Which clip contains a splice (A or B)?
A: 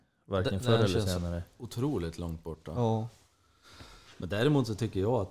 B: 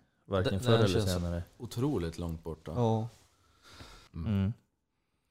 B